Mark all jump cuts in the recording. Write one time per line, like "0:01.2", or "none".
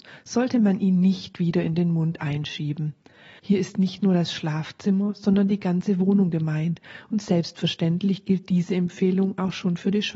0:03.4